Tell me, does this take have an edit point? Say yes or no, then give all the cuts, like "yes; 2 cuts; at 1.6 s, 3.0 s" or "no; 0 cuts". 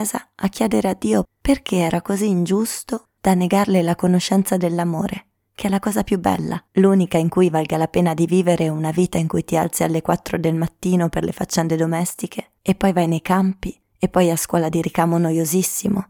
yes; 2 cuts; at 1.2 s, 6.7 s